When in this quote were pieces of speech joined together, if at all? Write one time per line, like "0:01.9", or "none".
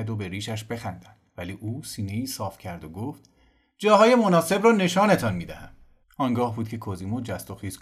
0:06.0